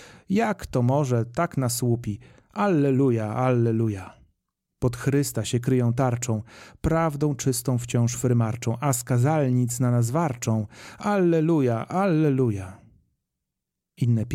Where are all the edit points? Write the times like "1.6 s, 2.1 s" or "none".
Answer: none